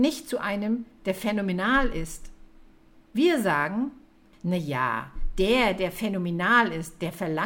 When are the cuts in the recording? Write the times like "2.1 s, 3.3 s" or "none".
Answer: none